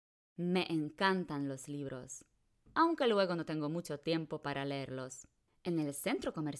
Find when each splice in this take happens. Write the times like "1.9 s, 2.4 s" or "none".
5.5 s